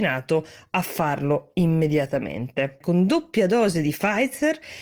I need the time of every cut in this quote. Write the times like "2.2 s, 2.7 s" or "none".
2.8 s